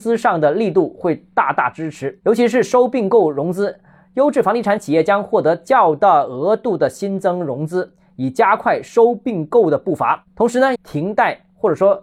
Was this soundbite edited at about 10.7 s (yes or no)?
yes